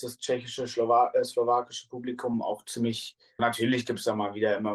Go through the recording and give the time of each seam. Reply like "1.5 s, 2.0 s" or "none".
3.4 s